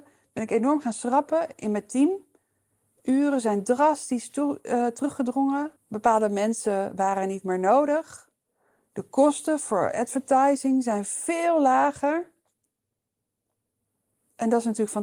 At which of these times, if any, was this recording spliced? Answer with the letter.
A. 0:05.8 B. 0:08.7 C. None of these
A